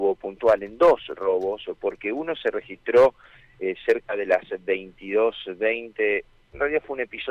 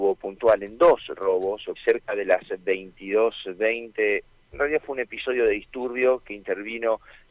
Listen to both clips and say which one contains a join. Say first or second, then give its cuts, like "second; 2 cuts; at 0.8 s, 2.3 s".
second; 1 cut; at 1.8 s